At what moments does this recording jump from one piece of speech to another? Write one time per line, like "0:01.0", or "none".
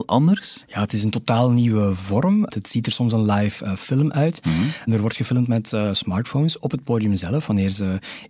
0:02.5

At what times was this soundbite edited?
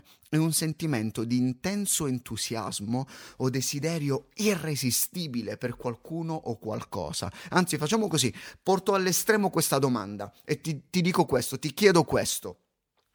0:07.5

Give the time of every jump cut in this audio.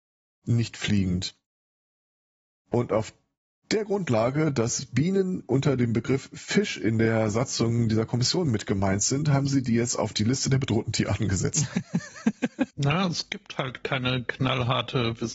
0:12.7

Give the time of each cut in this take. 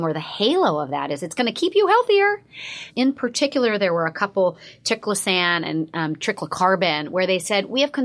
0:02.9

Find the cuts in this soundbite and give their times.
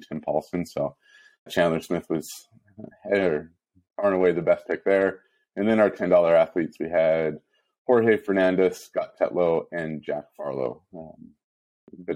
0:01.5

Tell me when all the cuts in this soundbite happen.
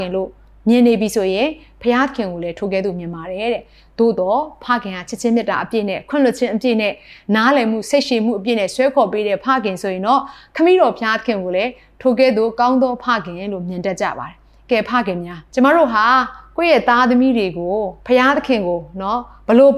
0:15.5
0:18.0

